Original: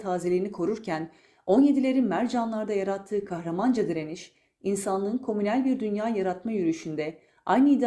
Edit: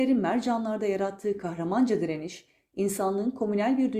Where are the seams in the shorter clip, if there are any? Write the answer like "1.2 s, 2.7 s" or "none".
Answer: none